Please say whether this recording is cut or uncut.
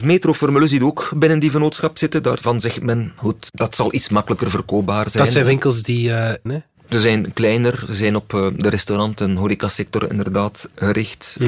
cut